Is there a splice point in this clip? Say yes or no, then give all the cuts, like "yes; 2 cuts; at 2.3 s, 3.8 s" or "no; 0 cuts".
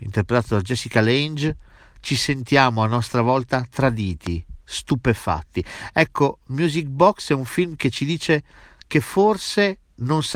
no; 0 cuts